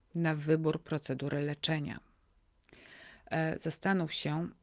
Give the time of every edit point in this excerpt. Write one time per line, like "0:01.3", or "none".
none